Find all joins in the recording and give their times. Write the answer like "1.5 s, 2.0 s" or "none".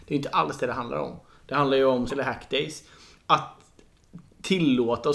2.1 s